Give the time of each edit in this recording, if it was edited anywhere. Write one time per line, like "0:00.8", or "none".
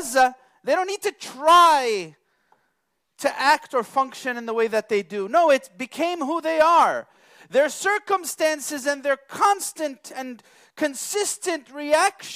none